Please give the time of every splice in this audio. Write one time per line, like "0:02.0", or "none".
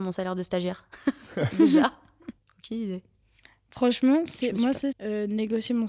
0:02.4
0:04.9